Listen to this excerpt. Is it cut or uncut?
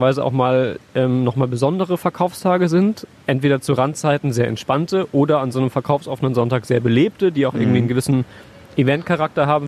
uncut